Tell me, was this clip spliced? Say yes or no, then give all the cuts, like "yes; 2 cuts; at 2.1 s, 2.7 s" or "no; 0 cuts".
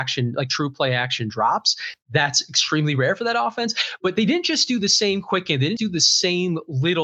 yes; 1 cut; at 5.8 s